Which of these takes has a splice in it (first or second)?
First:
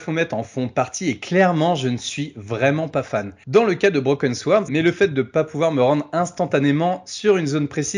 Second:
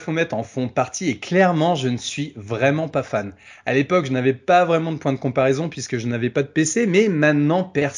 first